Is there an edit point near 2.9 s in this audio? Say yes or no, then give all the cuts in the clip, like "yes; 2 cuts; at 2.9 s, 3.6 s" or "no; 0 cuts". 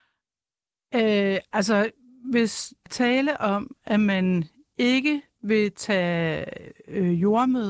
yes; 1 cut; at 2.9 s